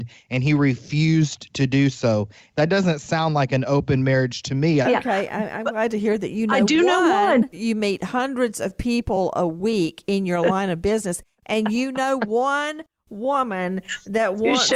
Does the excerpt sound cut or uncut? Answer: cut